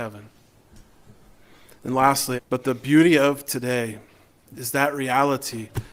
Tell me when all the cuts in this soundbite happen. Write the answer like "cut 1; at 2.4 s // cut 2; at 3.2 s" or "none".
cut 1; at 2.4 s